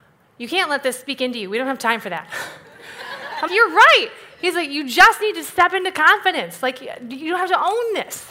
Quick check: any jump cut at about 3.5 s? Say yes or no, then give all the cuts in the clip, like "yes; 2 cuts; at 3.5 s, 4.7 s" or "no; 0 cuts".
yes; 1 cut; at 3.5 s